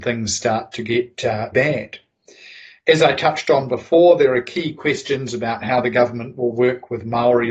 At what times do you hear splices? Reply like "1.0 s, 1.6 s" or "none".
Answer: 1.5 s